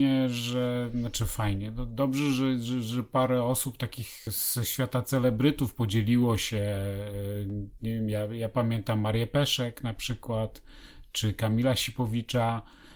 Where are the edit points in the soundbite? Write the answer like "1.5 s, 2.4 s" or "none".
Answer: none